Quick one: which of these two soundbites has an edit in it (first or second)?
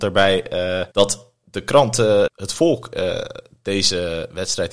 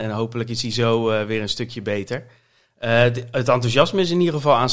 first